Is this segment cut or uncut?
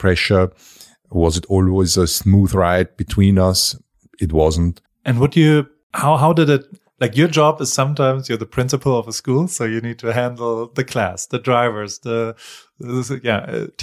cut